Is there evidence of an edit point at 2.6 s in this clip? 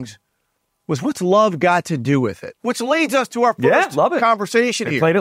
yes; 1 cut; at 2.6 s

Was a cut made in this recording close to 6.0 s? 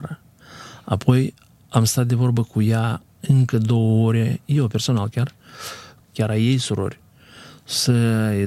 yes; 1 cut; at 6.0 s

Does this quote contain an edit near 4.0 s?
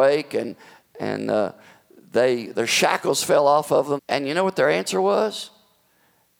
yes; 1 cut; at 4.0 s

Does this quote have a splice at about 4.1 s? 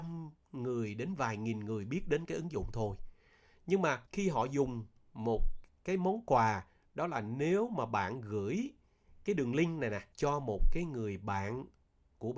yes; 2 cuts; at 4.1 s, 10.1 s

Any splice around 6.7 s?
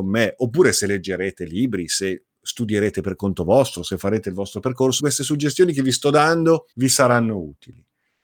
yes; 2 cuts; at 5.0 s, 6.7 s

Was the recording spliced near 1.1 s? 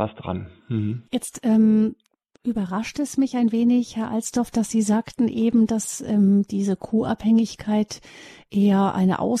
yes; 1 cut; at 1.1 s

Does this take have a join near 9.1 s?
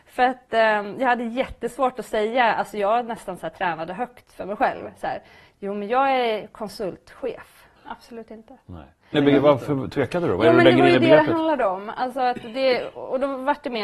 yes; 2 cuts; at 7.8 s, 9.1 s

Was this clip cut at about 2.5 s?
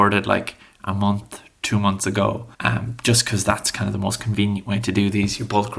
yes; 1 cut; at 2.5 s

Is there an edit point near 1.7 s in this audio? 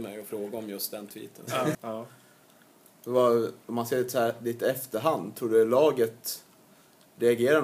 yes; 1 cut; at 1.7 s

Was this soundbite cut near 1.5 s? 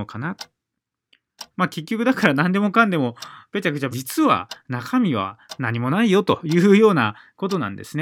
yes; 2 cuts; at 1.5 s, 3.9 s

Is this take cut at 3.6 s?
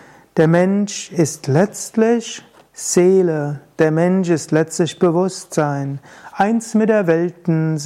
no; 0 cuts

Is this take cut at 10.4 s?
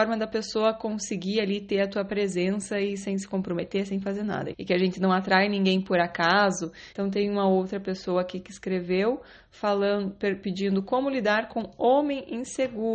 no; 2 cuts; at 4.5 s, 6.9 s

